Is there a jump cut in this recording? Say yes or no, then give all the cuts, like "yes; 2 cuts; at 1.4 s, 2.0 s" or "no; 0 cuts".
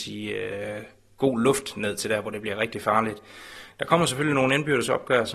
no; 0 cuts